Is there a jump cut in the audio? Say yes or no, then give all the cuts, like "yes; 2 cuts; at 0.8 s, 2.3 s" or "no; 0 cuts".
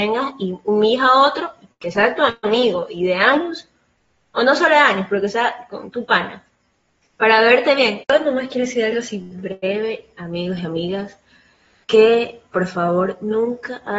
yes; 1 cut; at 8.0 s